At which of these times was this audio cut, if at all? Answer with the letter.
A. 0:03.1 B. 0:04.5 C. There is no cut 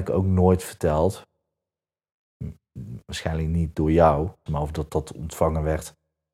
B